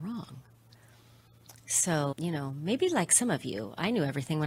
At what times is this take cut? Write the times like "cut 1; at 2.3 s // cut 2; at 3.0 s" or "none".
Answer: cut 1; at 2.1 s